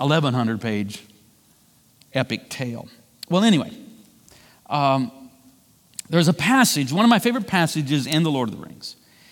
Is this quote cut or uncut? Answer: uncut